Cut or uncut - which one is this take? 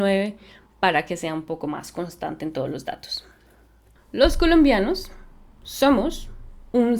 cut